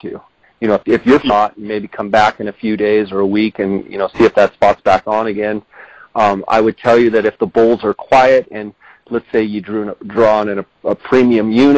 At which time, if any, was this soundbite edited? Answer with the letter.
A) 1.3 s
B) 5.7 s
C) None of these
A